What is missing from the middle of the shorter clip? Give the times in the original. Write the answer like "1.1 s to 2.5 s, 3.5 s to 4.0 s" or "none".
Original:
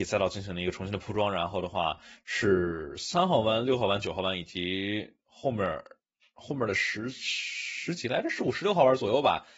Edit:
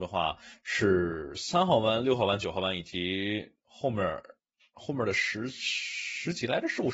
none